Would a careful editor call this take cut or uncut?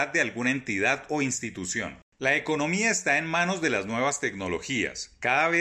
uncut